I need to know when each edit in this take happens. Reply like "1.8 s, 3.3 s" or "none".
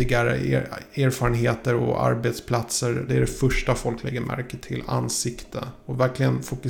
3.1 s